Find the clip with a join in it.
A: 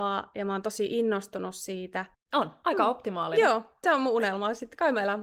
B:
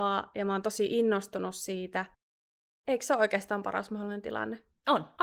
A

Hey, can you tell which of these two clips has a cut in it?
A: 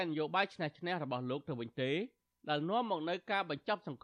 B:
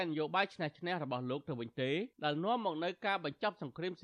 B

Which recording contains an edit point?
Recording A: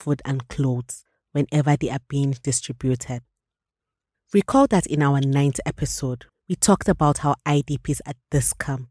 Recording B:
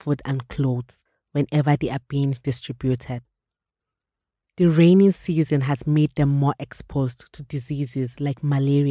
A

